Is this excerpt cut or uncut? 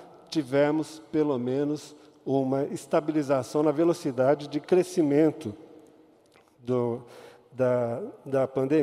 uncut